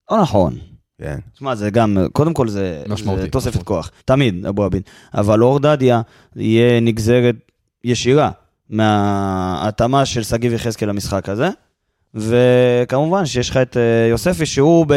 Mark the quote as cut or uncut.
cut